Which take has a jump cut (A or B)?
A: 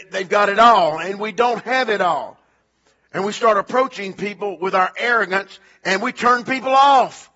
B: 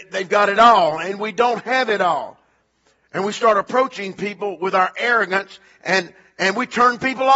A